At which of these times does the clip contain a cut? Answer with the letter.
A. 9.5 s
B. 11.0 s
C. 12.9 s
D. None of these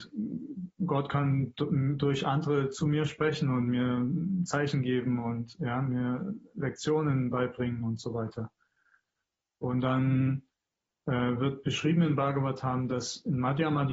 D